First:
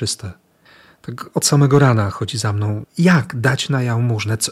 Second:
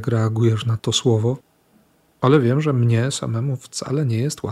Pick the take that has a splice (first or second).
first